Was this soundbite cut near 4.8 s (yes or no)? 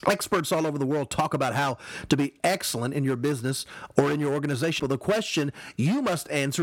yes